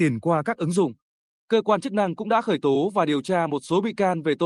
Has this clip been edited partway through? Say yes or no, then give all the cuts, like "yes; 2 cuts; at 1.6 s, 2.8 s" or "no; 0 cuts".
no; 0 cuts